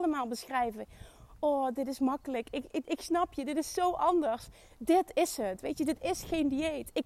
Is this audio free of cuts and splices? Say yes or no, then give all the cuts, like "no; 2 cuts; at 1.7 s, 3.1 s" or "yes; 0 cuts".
no; 1 cut; at 2.8 s